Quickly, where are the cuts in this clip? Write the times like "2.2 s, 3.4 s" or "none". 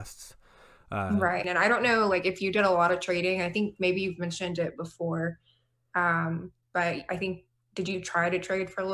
1.4 s